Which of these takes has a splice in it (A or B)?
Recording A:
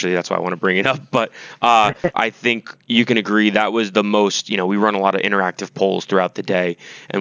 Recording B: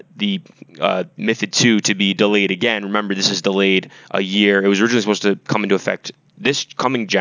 A